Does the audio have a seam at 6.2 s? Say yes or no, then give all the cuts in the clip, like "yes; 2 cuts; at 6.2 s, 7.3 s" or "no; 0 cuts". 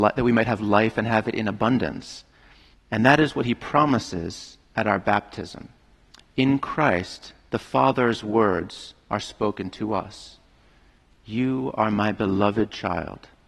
no; 1 cut; at 2.7 s